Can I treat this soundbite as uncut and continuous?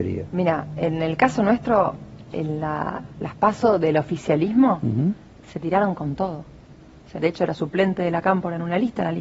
no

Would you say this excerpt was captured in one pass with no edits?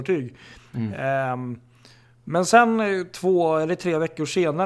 yes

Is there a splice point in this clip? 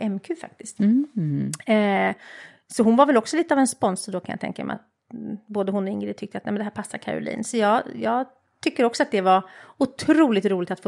no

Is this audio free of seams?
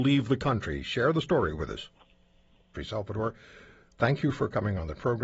no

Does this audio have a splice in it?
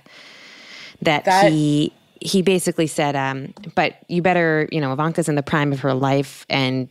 no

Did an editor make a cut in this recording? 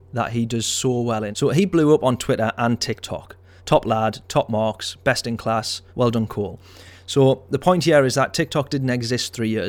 yes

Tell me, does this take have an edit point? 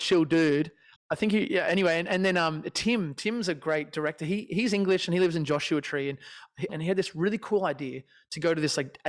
yes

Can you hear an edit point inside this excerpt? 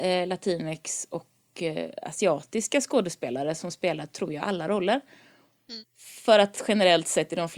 yes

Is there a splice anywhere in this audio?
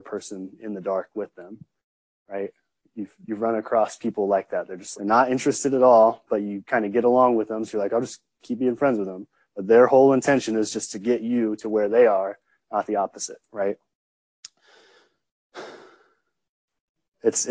yes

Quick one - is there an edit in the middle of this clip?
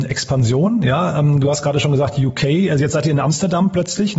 no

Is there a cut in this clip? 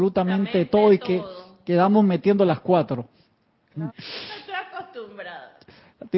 yes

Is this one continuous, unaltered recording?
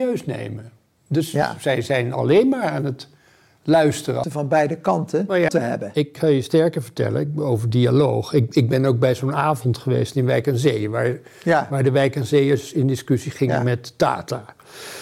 no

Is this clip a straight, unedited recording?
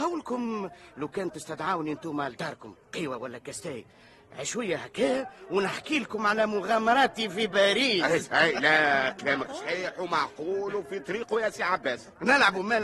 no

